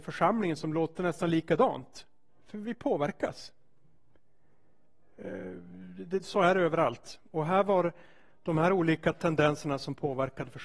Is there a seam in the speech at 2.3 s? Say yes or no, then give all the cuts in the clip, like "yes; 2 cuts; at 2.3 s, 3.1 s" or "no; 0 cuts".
no; 0 cuts